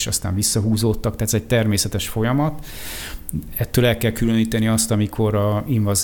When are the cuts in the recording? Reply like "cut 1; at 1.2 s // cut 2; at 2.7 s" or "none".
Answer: none